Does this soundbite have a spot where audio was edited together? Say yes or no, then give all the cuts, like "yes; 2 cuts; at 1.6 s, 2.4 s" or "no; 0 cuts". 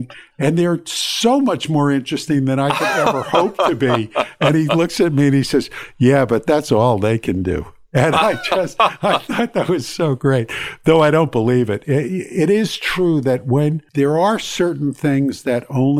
no; 0 cuts